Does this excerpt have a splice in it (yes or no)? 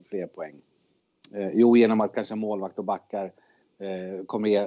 no